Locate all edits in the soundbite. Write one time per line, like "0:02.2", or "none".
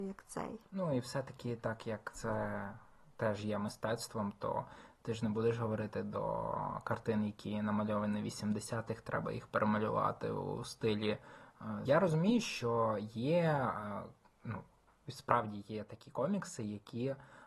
0:11.8